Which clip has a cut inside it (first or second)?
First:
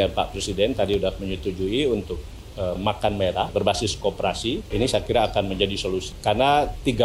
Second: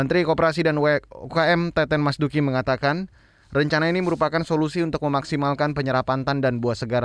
first